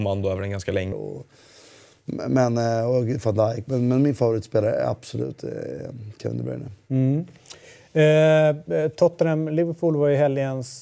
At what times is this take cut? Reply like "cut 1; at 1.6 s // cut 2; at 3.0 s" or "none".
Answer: cut 1; at 0.9 s